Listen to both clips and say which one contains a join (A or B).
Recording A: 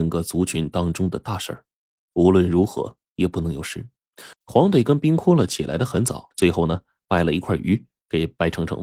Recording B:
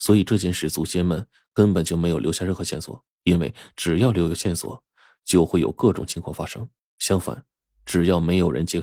A